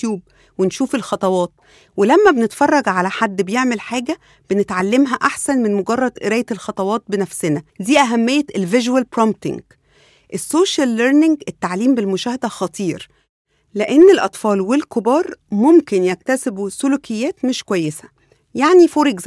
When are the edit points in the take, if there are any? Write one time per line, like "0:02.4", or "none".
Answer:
0:07.7